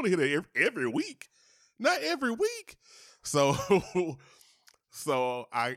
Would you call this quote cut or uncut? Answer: uncut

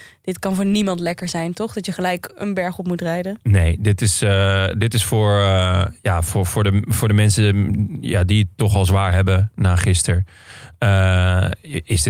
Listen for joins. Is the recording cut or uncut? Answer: uncut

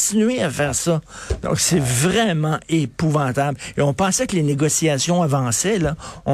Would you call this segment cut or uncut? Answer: uncut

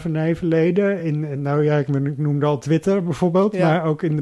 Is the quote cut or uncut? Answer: uncut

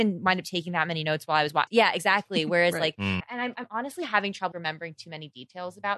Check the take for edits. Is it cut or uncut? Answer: cut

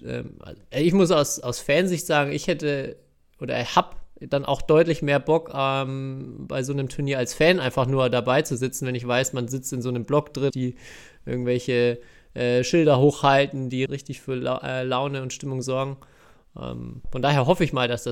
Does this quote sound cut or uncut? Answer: cut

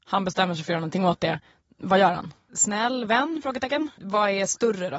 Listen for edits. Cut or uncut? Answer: cut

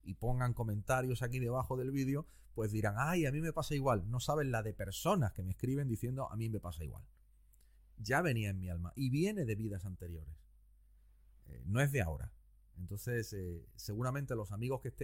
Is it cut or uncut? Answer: cut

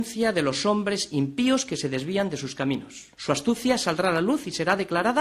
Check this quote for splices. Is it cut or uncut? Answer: cut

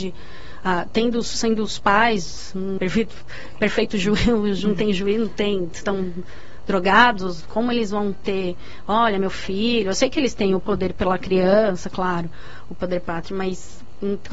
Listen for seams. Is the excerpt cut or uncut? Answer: cut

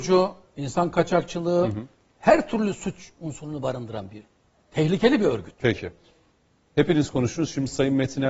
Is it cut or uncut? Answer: uncut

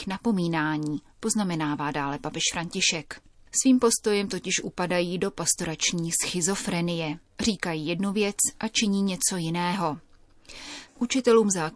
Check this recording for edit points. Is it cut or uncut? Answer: cut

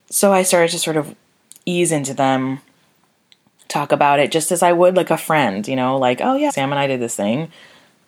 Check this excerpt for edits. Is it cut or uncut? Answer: cut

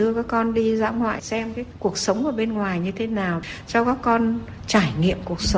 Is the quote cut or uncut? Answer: uncut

